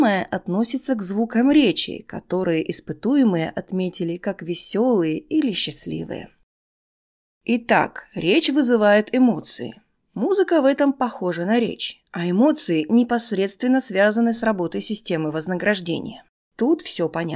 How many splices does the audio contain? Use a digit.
0